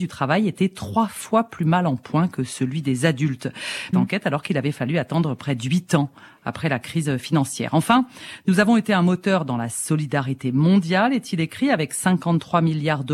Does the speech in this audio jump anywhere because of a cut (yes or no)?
yes